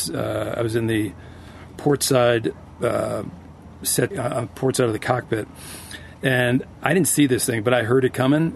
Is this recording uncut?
no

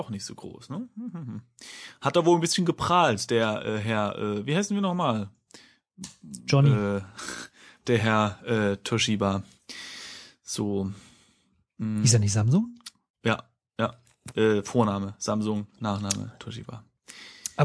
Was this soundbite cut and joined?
no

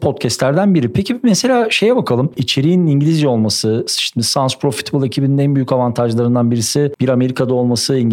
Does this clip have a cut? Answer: yes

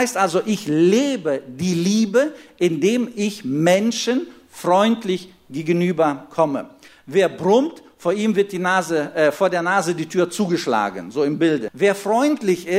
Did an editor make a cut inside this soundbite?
yes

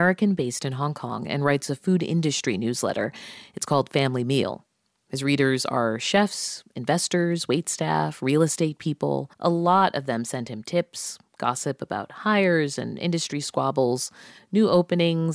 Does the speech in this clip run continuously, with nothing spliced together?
no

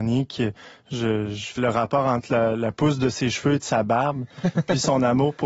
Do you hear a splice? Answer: yes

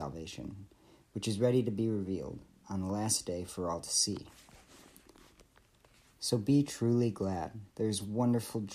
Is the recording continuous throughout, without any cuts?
no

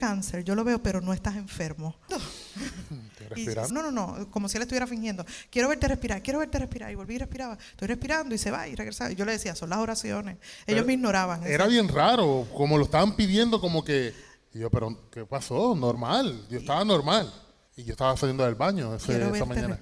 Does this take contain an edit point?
yes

